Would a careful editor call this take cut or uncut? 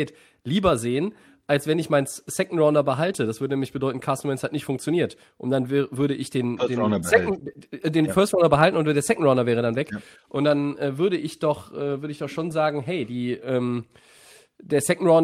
uncut